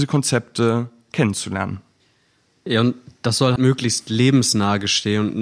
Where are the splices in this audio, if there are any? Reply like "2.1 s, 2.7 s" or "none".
3.6 s